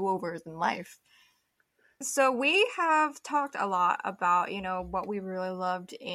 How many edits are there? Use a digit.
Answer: 0